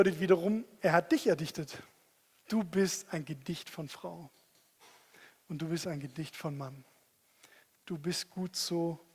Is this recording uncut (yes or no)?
no